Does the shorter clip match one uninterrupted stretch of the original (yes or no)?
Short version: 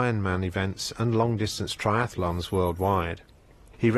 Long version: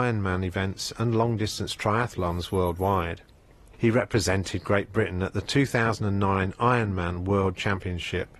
yes